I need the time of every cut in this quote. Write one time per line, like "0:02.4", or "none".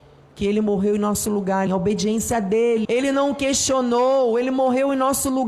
0:01.7
0:02.8

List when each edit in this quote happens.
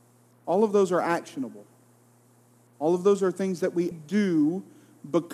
0:03.9

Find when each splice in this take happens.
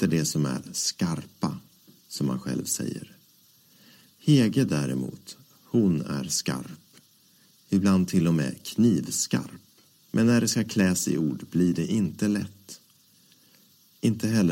0:10.0

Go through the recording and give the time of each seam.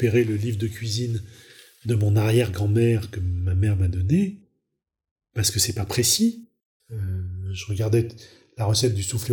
0:05.1
0:06.8

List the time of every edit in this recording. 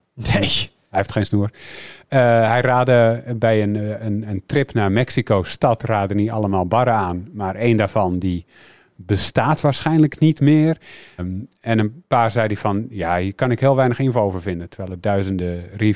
0:11.2

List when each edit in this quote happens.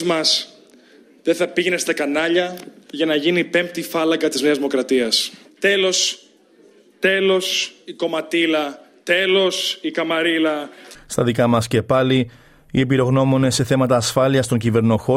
0:10.9

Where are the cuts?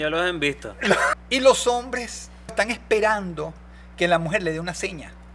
0:01.1
0:02.5

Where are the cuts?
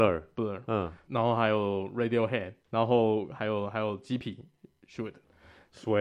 0:01.1
0:02.6

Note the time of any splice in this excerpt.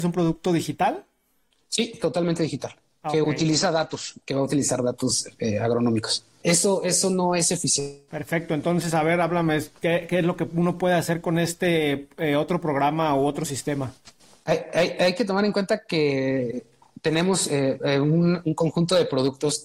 0:06.4
0:08.1

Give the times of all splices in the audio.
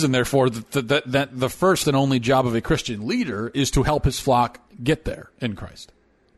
0:01.8

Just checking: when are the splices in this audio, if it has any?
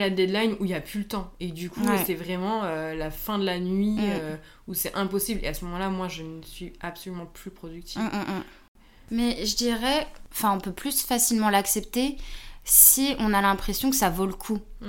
none

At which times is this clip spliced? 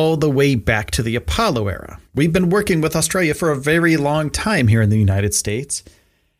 0:02.1

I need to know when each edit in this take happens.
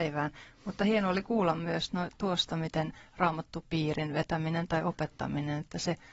none

